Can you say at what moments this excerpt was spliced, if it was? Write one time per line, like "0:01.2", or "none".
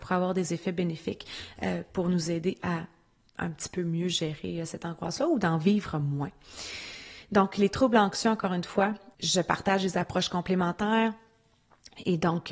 0:09.1